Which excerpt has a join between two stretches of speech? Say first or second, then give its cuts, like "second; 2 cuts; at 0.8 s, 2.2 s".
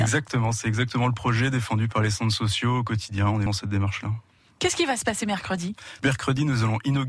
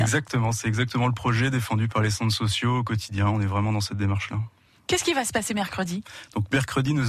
first; 2 cuts; at 3.5 s, 6.0 s